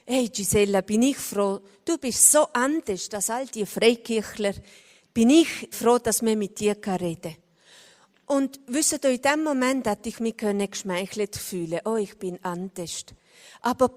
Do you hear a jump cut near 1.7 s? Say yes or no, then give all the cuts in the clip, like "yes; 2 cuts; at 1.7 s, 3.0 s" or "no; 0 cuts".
no; 1 cut; at 5.7 s